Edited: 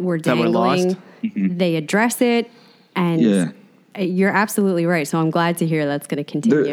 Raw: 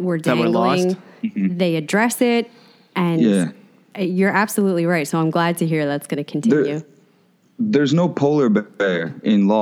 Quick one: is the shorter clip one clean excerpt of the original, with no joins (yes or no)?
yes